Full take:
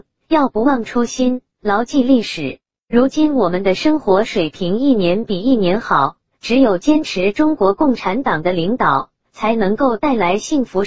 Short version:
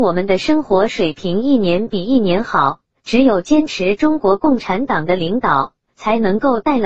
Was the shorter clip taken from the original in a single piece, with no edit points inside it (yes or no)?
yes